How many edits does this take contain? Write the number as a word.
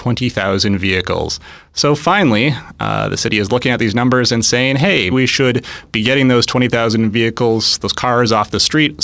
one